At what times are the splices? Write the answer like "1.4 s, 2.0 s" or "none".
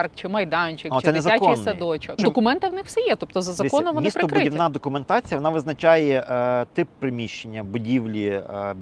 2.2 s